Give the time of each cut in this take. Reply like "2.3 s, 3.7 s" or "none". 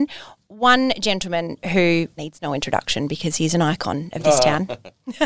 2.2 s